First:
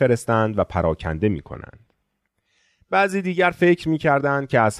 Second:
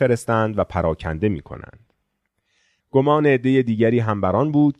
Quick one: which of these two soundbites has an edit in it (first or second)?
second